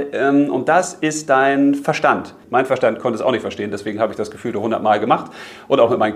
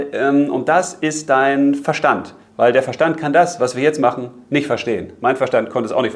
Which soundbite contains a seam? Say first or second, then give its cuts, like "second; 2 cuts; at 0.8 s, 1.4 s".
first; 1 cut; at 2.4 s